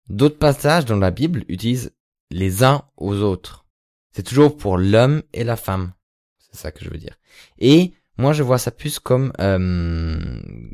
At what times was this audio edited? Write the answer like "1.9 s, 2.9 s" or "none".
6.2 s